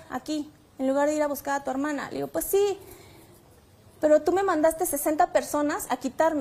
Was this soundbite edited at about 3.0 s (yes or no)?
no